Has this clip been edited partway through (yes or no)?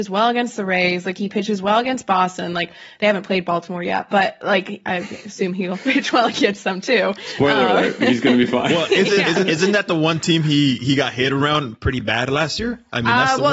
yes